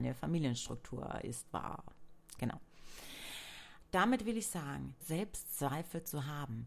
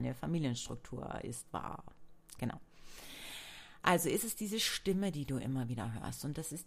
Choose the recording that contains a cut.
first; 2 cuts; at 3.8 s, 5.0 s

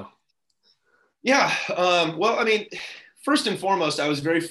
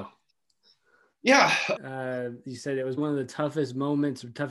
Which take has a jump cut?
second; 2 cuts; at 1.8 s, 3.0 s

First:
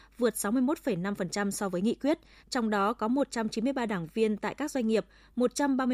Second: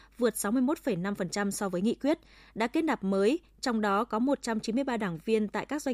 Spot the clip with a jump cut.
first; 1 cut; at 2.4 s

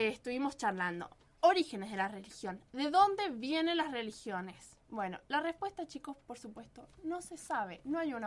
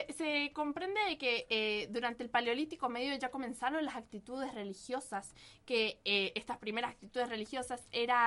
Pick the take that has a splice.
first; 1 cut; at 4.8 s

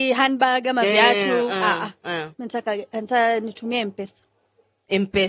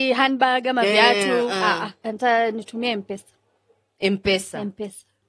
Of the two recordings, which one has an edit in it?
second; 1 cut; at 2.0 s

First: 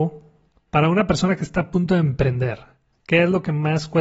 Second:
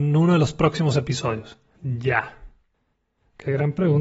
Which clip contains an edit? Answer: second; 1 cut; at 1.7 s

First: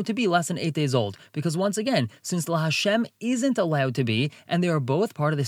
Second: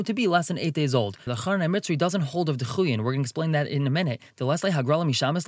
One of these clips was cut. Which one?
second; 1 cut; at 1.3 s

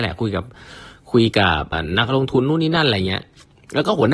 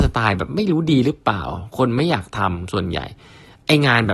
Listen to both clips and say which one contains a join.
first; 1 cut; at 1.7 s

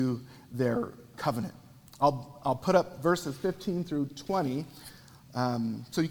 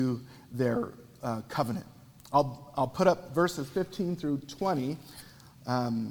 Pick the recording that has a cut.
first; 1 cut; at 1.1 s

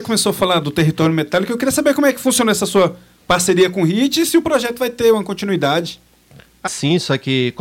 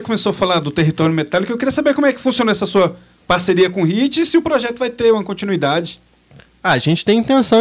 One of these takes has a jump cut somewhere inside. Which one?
first; 1 cut; at 6.7 s

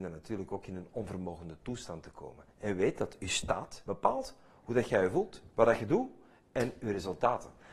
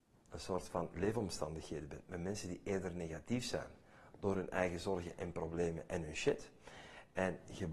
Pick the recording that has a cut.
first; 1 cut; at 3.8 s

